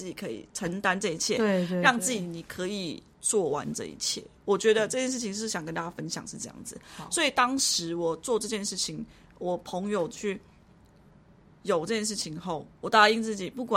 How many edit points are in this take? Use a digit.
1